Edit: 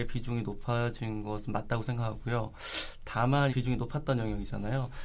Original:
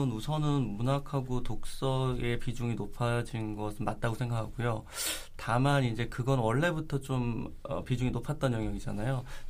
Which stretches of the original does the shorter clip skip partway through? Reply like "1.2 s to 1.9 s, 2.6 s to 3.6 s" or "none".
5.8 s to 7.8 s